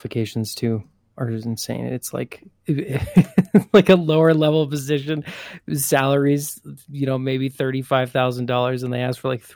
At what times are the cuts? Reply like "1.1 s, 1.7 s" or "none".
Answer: none